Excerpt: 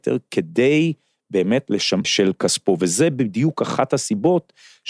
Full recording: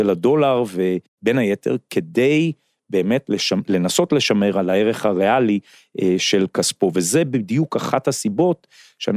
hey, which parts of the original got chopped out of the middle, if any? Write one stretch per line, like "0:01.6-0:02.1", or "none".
0:03.6-0:06.2